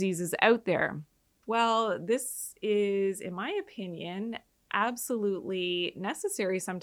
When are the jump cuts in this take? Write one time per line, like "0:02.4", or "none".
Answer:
0:01.4

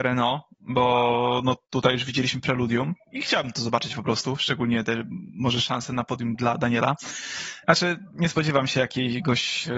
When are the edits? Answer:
0:06.4
0:07.6

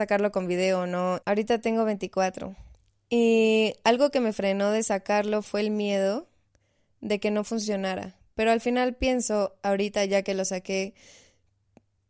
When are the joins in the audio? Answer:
0:01.2

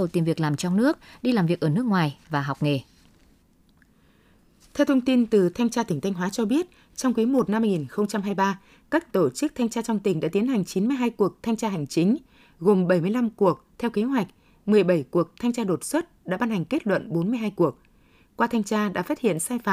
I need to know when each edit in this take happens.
none

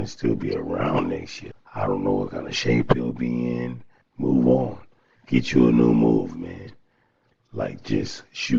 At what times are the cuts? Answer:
0:01.5
0:04.0

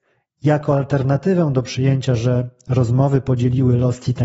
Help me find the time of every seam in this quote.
none

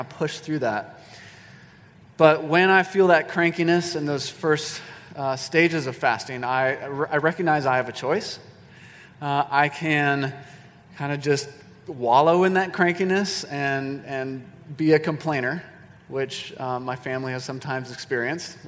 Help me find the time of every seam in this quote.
none

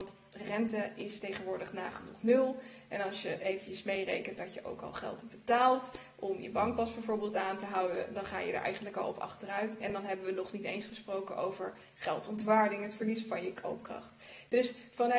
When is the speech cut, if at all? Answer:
none

